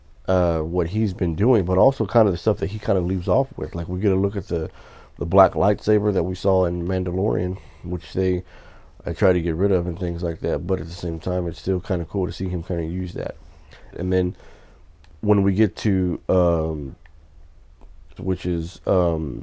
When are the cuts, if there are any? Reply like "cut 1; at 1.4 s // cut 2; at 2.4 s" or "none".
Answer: cut 1; at 13.9 s // cut 2; at 18.2 s